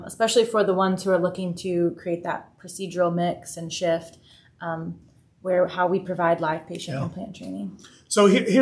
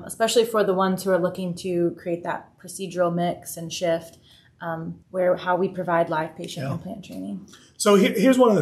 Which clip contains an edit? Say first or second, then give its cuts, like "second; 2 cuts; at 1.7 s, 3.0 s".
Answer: second; 1 cut; at 5.0 s